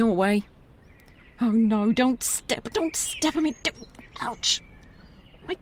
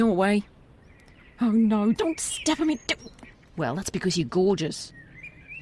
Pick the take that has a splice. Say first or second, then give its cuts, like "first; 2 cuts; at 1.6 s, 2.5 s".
second; 2 cuts; at 1.9 s, 3.3 s